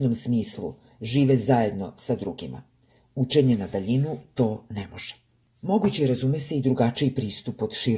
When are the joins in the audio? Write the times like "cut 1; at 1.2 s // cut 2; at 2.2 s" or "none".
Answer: cut 1; at 5.4 s

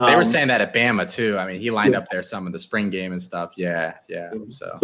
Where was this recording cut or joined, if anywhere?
none

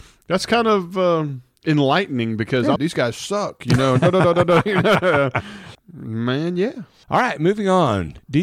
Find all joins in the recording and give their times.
cut 1; at 2.8 s // cut 2; at 5.7 s // cut 3; at 7.0 s

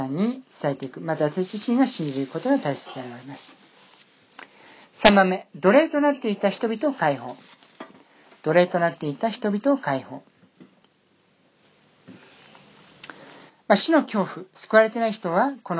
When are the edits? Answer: none

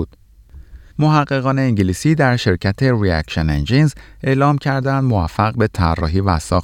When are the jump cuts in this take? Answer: cut 1; at 0.9 s

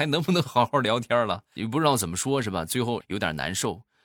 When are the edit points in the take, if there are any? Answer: cut 1; at 1.6 s // cut 2; at 3.0 s

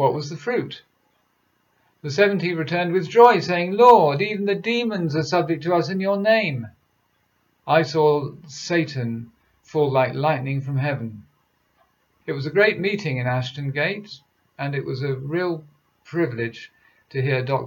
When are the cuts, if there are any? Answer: cut 1; at 7.6 s // cut 2; at 12.2 s

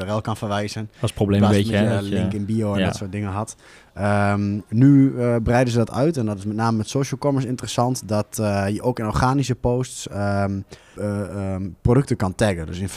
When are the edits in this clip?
cut 1; at 10.9 s

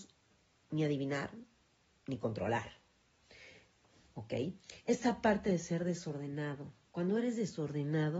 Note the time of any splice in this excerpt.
none

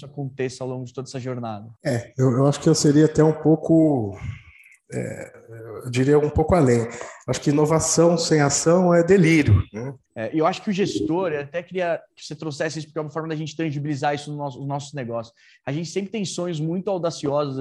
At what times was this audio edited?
cut 1; at 1.8 s // cut 2; at 10.1 s

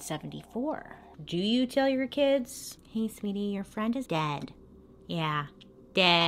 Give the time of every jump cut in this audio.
cut 1; at 1.1 s // cut 2; at 4.1 s

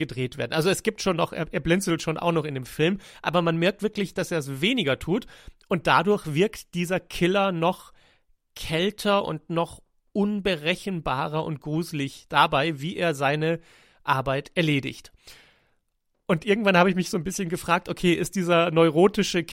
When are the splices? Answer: none

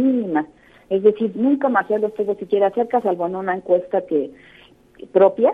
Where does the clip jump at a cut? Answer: cut 1; at 1.3 s

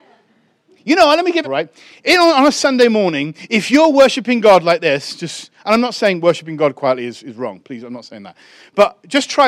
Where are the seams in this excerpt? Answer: cut 1; at 1.4 s

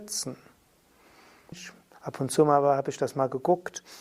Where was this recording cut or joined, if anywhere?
cut 1; at 1.5 s

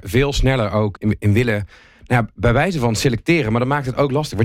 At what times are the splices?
cut 1; at 1.0 s

